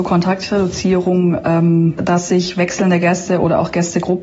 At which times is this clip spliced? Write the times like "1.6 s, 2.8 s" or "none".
2.0 s